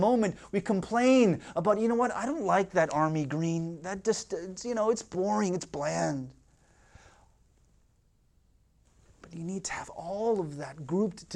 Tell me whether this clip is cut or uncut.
uncut